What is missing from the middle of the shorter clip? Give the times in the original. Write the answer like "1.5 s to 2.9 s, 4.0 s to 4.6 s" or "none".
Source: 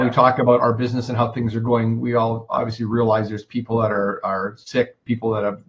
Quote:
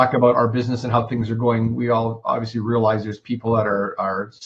none